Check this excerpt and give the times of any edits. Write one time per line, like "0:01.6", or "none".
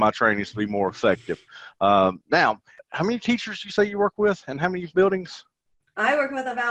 0:02.8